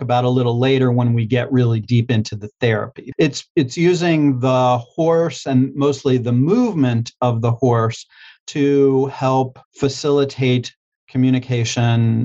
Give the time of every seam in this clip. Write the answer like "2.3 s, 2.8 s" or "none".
3.1 s, 9.6 s